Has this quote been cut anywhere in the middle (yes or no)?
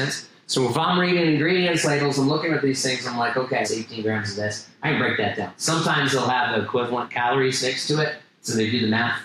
yes